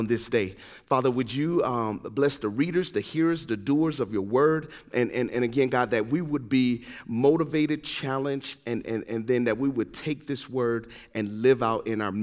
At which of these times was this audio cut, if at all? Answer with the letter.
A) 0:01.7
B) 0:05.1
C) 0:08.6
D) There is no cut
D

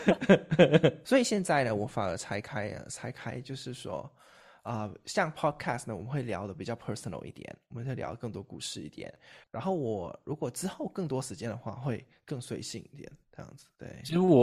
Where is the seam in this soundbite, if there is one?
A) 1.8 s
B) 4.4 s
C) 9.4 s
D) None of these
C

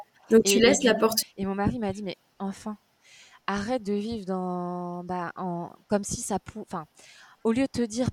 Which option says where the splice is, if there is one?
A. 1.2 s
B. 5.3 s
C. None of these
A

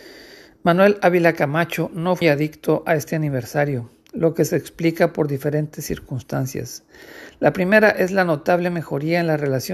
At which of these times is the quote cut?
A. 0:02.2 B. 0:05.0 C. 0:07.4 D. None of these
A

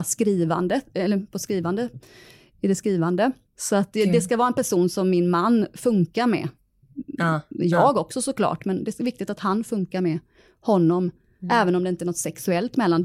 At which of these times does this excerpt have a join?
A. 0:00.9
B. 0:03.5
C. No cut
B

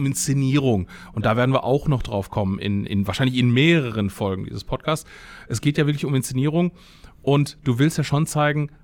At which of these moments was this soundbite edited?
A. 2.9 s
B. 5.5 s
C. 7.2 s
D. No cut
A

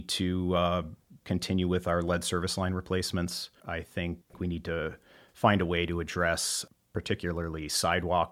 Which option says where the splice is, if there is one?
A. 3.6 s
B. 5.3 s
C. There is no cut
A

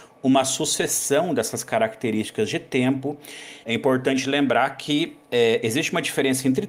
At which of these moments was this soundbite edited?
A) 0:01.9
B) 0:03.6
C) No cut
B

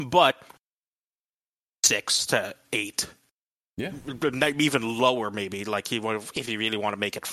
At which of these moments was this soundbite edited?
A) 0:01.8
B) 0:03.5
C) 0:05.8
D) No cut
D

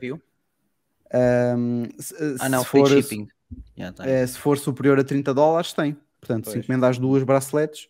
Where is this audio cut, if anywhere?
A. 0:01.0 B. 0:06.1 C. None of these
B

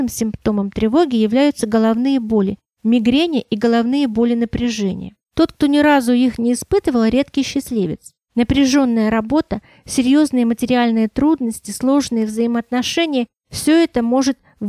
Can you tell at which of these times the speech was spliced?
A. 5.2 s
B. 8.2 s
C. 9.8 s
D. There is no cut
A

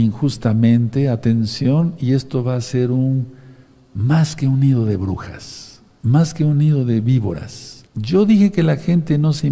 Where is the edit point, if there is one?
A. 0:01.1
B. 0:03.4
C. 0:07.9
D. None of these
C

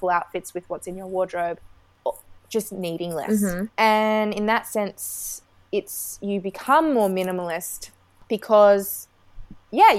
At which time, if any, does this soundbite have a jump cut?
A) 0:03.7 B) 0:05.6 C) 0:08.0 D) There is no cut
A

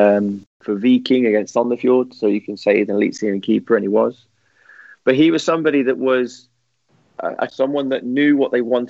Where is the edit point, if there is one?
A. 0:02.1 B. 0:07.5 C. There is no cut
B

